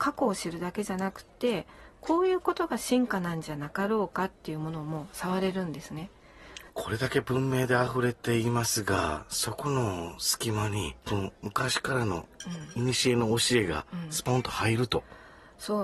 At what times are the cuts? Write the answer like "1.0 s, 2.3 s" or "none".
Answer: 6.7 s, 11.0 s